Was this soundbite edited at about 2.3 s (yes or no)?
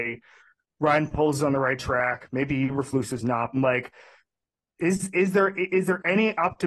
no